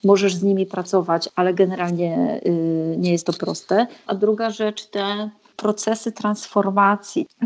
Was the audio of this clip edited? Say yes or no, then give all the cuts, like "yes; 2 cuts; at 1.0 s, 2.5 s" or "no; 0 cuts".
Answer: yes; 1 cut; at 4.1 s